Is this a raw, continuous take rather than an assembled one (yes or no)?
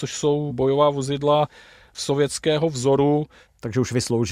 yes